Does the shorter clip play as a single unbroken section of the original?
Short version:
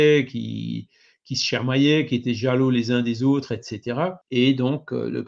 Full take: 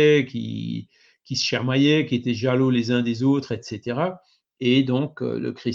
no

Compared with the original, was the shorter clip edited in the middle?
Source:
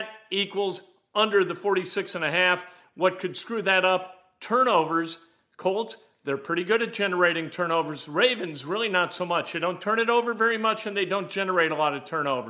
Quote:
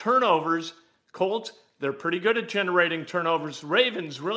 no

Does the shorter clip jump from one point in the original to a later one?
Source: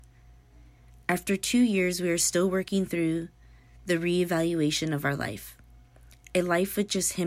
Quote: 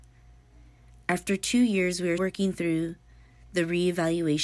yes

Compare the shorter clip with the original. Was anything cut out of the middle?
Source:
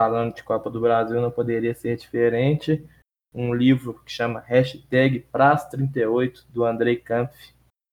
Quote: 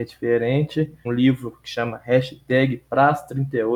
yes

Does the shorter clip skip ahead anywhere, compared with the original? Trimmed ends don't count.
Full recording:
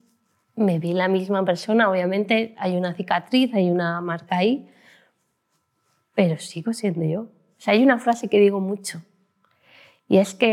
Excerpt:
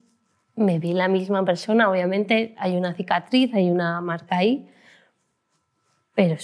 no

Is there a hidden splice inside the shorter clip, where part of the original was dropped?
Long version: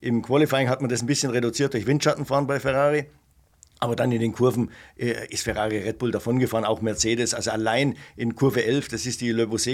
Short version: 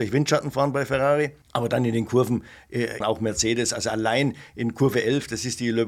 yes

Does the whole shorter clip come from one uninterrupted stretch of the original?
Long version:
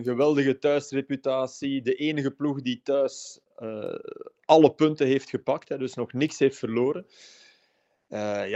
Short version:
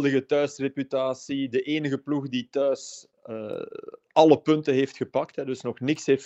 yes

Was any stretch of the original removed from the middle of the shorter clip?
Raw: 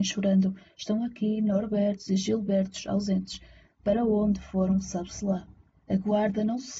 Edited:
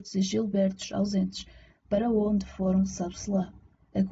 no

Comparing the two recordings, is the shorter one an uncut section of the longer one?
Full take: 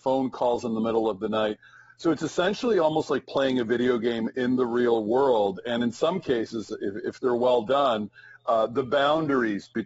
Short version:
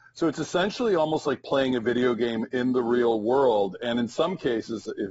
yes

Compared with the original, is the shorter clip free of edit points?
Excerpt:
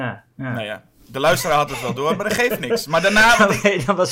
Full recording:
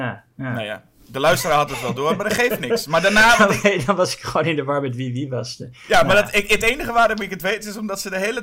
yes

